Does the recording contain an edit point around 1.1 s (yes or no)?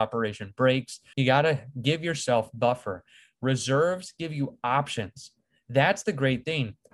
yes